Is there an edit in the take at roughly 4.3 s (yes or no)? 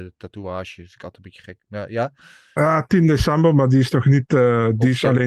no